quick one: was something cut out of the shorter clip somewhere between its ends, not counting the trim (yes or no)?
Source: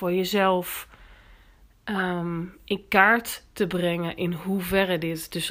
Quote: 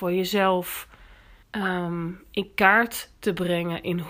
yes